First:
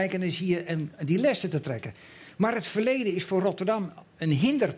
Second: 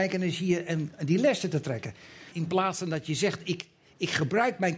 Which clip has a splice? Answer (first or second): second